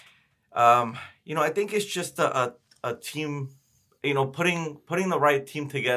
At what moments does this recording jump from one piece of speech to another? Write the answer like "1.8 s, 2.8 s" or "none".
none